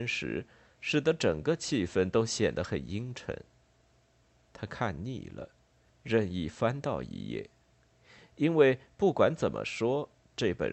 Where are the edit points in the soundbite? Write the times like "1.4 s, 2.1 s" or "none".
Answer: 5.9 s